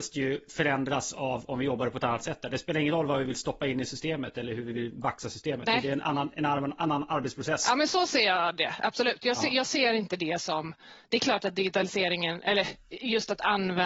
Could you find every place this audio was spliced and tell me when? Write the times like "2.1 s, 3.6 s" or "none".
none